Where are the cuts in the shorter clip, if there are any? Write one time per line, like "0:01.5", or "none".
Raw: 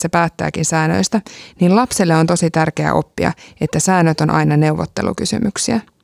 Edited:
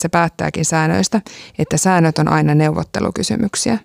0:01.5

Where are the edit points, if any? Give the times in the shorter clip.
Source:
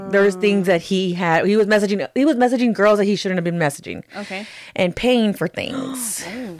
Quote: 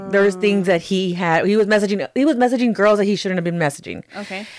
none

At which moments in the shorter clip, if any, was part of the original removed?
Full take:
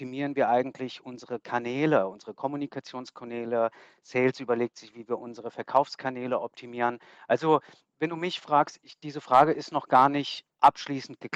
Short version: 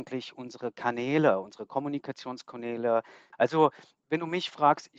0:03.3

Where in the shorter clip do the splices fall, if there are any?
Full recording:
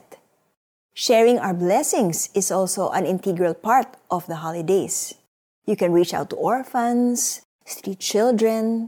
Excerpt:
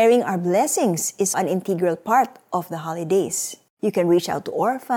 0:01.3
0:03.7

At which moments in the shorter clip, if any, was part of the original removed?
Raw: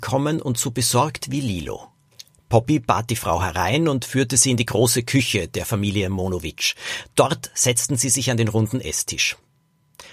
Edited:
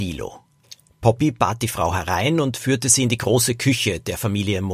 none

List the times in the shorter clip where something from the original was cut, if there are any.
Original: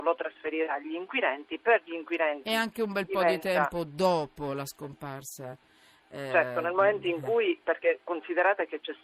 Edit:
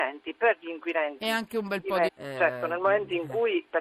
0:02.1

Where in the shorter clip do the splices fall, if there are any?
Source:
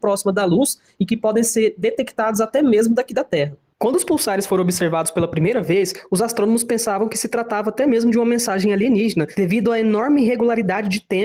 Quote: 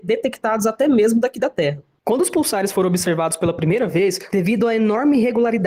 0:04.3

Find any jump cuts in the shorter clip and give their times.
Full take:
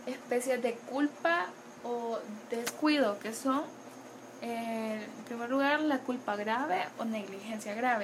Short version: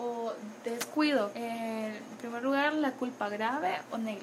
0:01.3

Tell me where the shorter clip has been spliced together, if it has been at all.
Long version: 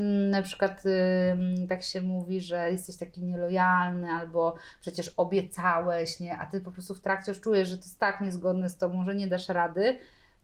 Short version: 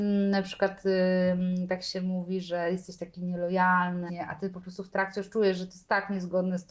0:04.1

